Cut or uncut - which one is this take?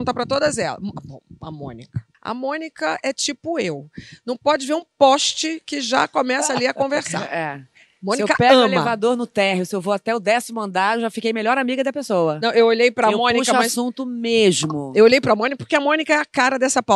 cut